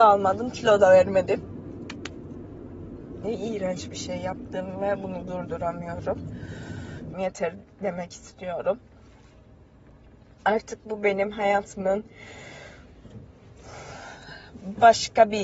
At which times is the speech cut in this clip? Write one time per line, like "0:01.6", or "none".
0:03.2
0:07.1